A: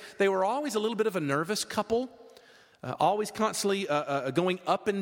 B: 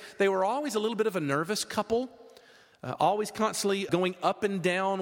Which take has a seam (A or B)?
B